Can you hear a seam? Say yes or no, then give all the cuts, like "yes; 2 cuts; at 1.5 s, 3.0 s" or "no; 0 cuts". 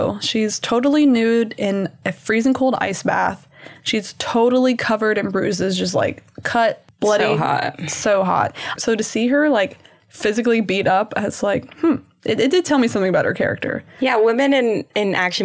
yes; 1 cut; at 8.8 s